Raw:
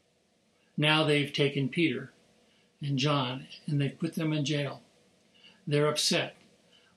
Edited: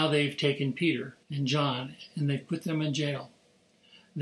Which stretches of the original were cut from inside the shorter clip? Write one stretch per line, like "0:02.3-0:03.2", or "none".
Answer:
0:02.2-0:02.7